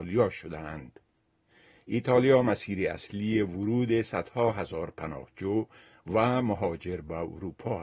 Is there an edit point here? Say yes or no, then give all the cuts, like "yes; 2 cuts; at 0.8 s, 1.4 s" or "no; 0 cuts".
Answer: no; 0 cuts